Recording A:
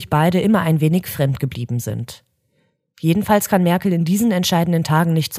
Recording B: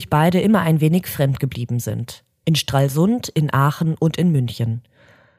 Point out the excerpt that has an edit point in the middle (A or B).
B